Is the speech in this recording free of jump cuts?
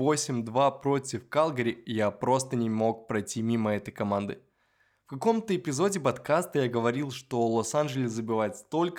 yes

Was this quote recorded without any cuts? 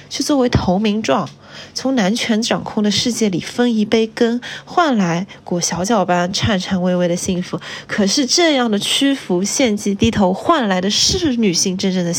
yes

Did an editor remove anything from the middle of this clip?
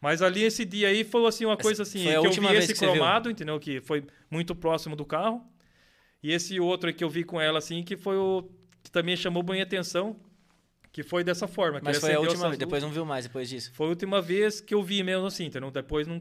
no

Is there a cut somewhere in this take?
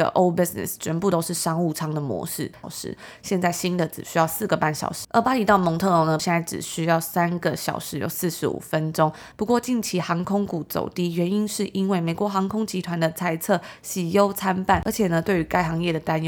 yes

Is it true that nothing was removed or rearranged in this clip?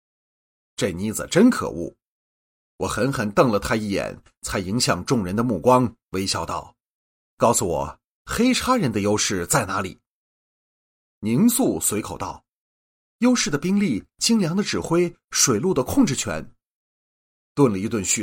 yes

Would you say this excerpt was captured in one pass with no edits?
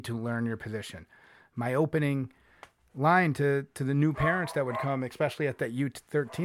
yes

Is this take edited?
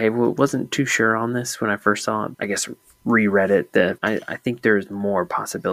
yes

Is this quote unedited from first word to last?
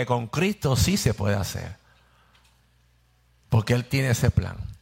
yes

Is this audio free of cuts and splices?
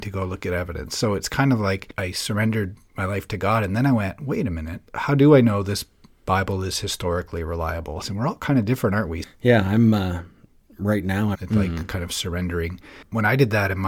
no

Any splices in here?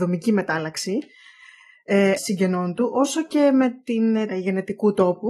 yes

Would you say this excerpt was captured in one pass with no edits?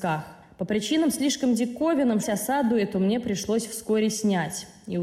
no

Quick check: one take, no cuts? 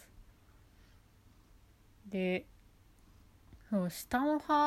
yes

